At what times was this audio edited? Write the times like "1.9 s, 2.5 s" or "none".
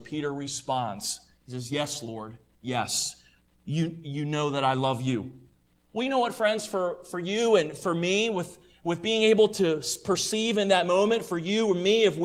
none

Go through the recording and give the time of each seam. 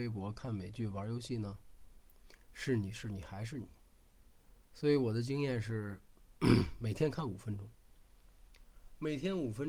none

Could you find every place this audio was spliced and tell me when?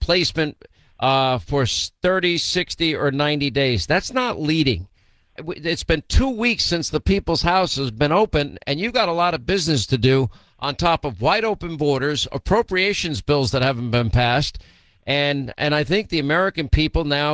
5.4 s

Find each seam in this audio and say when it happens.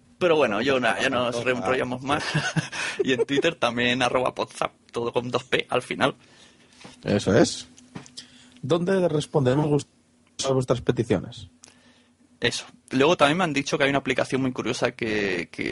2.2 s

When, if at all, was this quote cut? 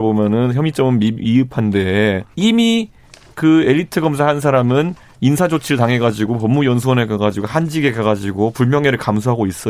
2.3 s

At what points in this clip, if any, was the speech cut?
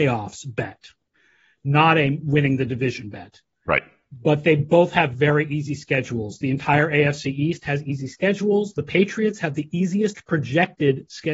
none

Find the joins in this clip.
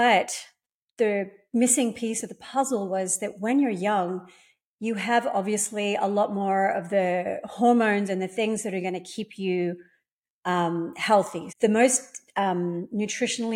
11.5 s

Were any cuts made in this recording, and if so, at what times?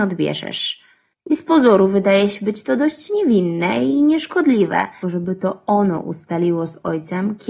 1.1 s, 5.0 s

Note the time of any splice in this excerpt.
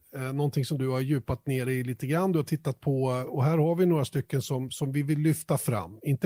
3.3 s, 4.7 s

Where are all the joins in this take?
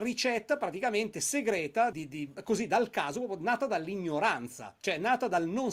1.9 s

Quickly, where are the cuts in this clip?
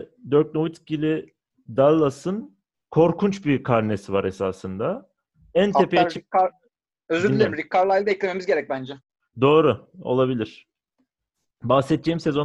none

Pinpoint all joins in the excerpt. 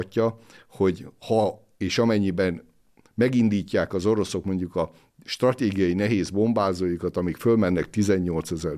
none

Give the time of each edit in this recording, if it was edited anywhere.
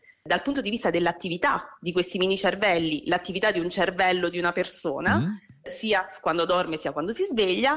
none

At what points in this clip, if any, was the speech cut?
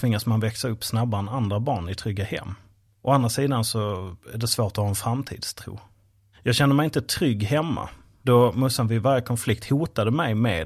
none

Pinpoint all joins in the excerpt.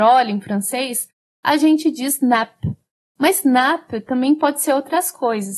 none

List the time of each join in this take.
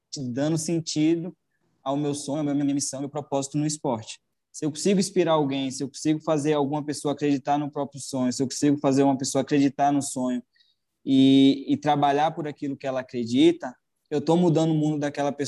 4.3 s

